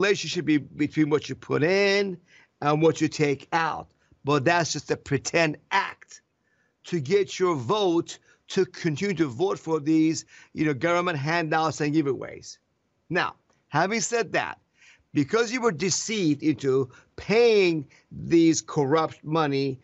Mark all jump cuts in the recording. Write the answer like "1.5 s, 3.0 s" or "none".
none

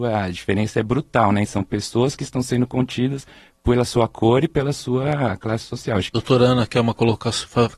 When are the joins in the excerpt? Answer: 1.5 s

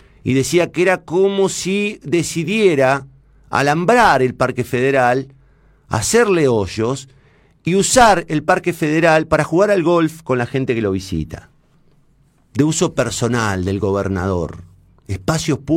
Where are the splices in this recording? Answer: none

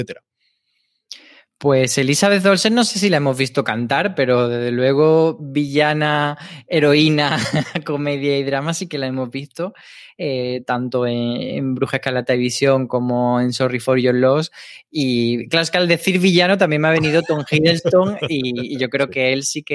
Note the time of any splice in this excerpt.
none

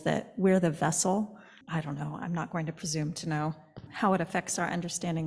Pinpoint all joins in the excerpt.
1.6 s, 3.9 s

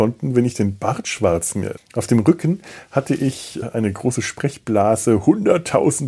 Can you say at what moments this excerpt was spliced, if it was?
1.8 s, 3.6 s

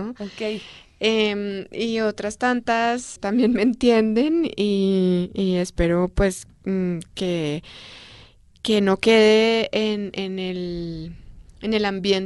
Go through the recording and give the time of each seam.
3.2 s

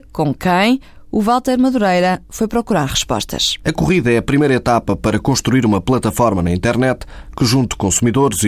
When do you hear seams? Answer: none

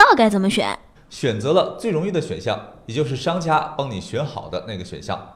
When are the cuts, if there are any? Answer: 1.0 s

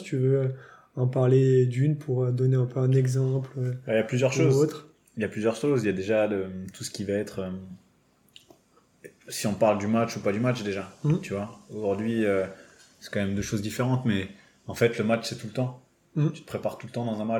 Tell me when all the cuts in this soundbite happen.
none

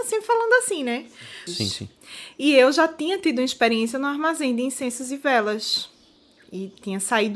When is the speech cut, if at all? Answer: 1.5 s

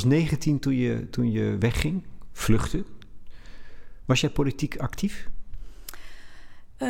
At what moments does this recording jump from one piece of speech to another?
none

